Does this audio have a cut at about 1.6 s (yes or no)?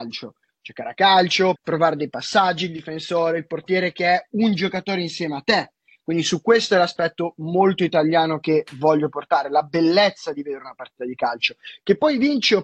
yes